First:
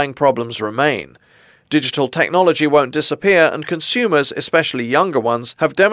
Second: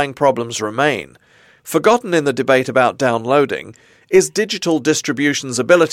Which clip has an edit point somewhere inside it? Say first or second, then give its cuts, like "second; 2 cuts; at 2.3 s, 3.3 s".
second; 1 cut; at 1.6 s